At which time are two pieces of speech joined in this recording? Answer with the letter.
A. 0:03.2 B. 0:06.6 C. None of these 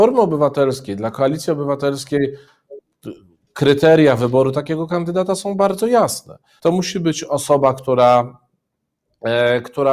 B